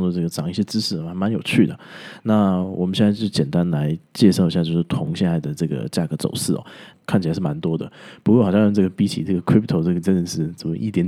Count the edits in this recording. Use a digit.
1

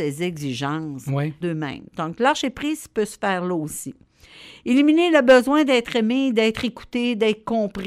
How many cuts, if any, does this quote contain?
1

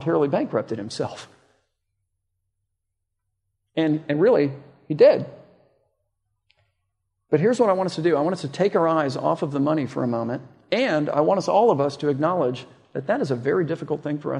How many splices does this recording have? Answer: 0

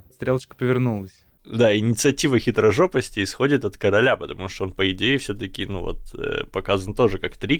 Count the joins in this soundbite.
0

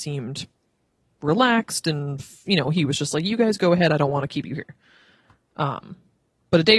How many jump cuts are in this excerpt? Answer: 0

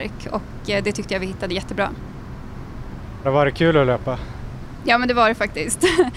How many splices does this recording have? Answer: 1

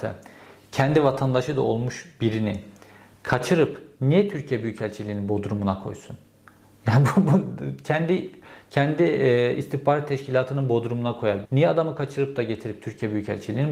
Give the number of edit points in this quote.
1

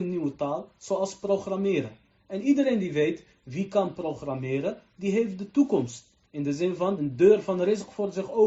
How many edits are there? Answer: 1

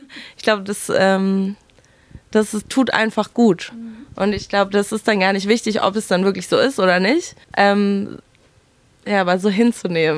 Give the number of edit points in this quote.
1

